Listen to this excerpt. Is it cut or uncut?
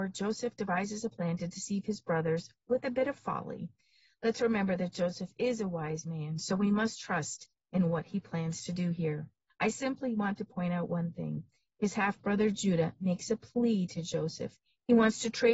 cut